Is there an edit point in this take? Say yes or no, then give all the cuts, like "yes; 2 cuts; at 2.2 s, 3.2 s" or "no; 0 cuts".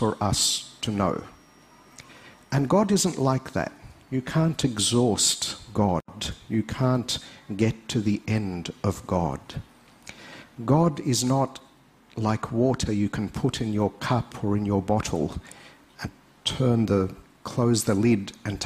no; 0 cuts